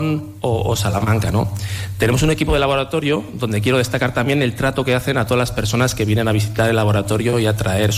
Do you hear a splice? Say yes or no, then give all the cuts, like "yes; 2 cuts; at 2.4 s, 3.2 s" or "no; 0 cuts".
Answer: no; 0 cuts